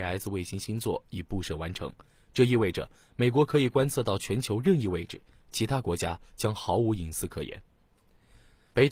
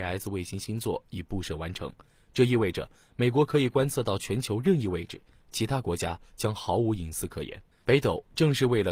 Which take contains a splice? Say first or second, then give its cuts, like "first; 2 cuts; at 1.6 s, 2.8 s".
second; 1 cut; at 7.7 s